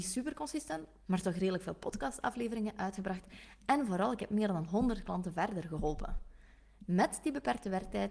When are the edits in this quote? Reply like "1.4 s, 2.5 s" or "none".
1.0 s